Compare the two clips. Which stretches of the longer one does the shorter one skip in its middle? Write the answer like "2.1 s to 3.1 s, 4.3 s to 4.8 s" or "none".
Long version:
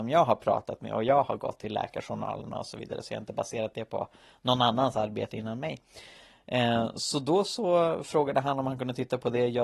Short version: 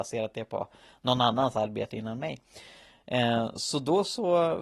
none

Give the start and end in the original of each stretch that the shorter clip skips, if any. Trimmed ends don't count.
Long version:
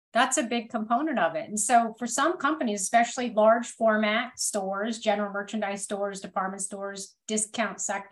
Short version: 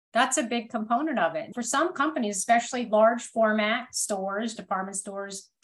1.5 s to 2.0 s, 5.0 s to 6.2 s

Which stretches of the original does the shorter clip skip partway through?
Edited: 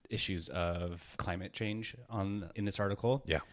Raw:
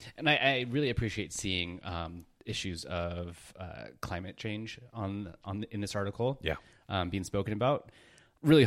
3.5 s to 4.0 s, 5.4 s to 5.7 s

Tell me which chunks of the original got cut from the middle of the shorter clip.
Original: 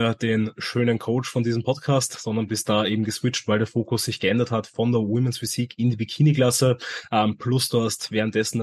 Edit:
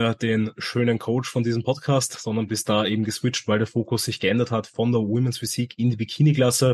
none

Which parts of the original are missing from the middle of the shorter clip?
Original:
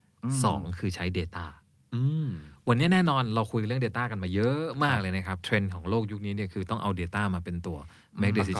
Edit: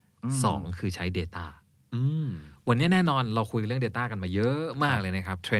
none

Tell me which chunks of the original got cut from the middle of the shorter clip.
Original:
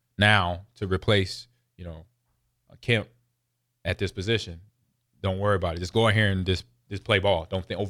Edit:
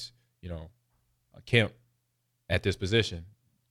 none

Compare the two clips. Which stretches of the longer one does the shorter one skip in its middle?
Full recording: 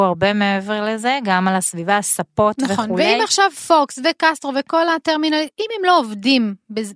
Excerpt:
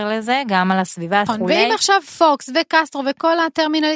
2.0 s to 2.8 s

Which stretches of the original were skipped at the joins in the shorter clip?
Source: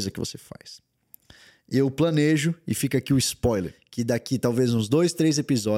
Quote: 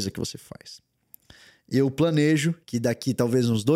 2.6 s to 3.9 s

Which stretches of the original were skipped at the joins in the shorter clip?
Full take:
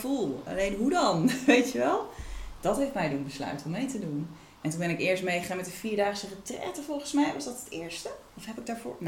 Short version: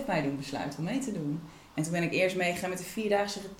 none

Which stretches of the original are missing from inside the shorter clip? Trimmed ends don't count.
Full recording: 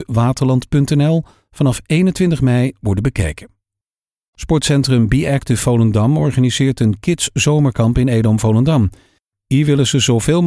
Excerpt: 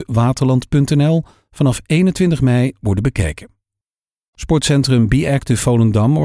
none

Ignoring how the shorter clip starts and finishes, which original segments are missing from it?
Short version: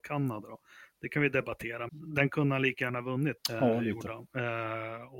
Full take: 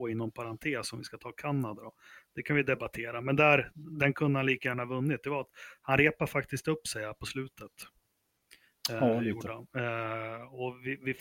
3.2 s to 3.7 s, 5.2 s to 8.8 s

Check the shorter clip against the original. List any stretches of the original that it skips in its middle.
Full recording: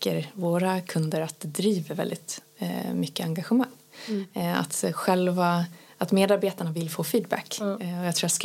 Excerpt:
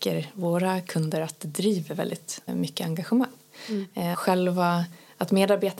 2.5 s to 2.9 s, 4.5 s to 4.9 s

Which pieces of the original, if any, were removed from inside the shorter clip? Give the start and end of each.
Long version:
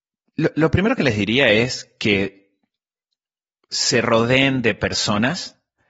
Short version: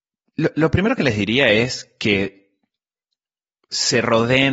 none

